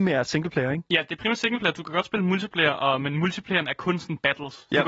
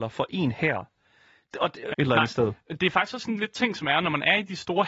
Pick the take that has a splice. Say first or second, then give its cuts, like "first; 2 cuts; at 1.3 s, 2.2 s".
second; 1 cut; at 1.9 s